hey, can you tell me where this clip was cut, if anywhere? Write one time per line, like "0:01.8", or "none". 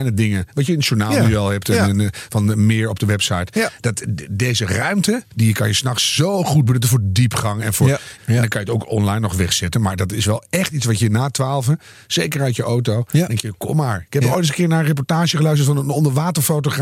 0:08.2